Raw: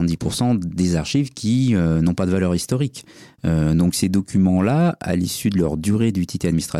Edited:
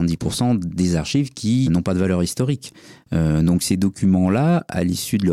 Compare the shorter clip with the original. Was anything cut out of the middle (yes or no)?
yes